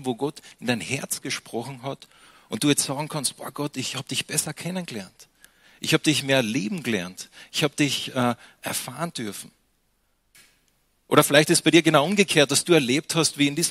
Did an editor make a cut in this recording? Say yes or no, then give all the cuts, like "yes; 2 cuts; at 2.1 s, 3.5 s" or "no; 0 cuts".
no; 0 cuts